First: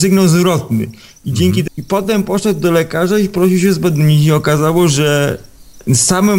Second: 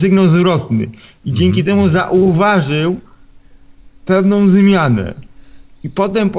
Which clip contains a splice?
first; 1 cut; at 1.7 s

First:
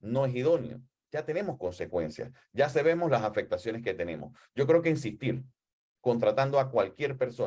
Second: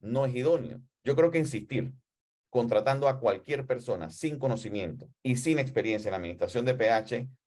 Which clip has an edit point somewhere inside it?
second; 2 cuts; at 1.0 s, 5.2 s

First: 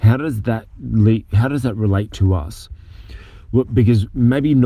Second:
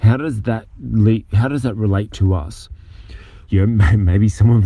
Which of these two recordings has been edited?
second; 1 cut; at 3.5 s

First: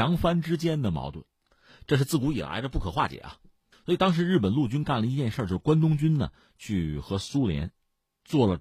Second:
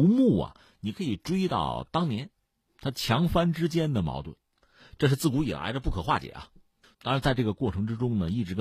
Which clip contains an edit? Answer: second; 1 cut; at 6.9 s

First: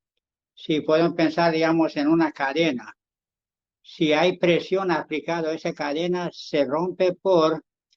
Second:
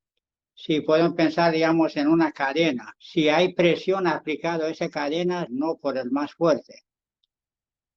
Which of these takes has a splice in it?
second; 2 cuts; at 3.0 s, 5.5 s

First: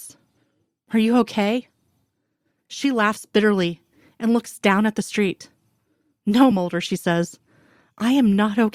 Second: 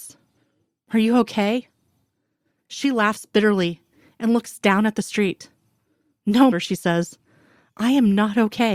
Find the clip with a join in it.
second; 1 cut; at 6.5 s

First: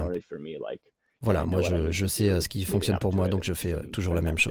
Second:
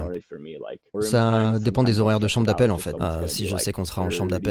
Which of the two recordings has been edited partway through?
second; 2 cuts; at 0.9 s, 3.0 s

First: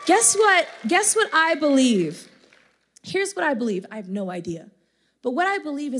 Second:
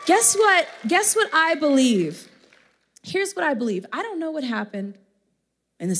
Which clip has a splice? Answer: first; 1 cut; at 3.9 s

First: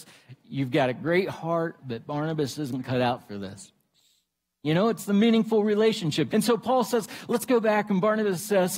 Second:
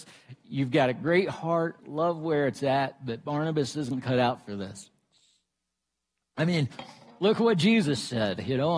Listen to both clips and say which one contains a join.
first; 3 cuts; at 1.8 s, 4.6 s, 6.3 s

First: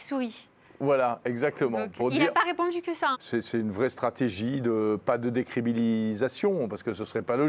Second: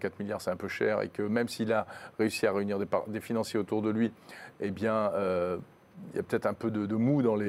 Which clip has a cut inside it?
first; 1 cut; at 3.1 s

